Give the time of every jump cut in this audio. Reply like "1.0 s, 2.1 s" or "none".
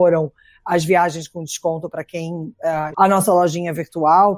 2.9 s